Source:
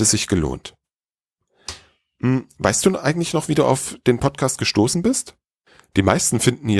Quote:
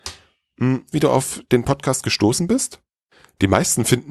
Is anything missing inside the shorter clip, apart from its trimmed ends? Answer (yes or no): yes